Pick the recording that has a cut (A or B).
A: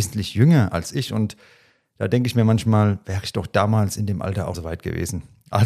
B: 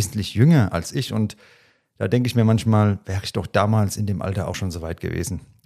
A